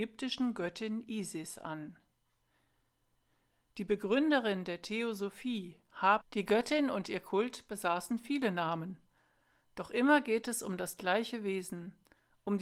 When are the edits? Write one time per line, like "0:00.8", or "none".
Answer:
0:06.2